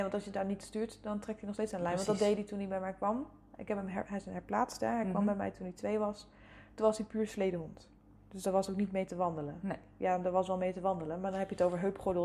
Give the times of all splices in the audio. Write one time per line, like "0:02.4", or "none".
none